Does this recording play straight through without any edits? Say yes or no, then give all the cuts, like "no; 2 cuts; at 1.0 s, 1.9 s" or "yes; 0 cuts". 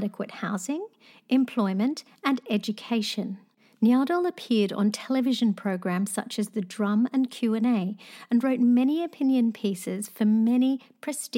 yes; 0 cuts